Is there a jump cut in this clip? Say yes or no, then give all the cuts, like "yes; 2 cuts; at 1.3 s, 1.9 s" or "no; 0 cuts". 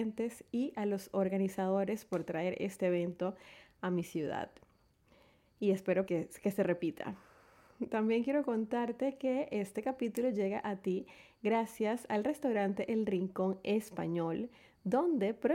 yes; 1 cut; at 6.1 s